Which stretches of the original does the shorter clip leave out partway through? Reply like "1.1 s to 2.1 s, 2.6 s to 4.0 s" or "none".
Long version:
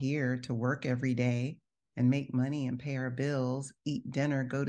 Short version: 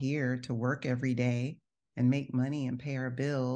none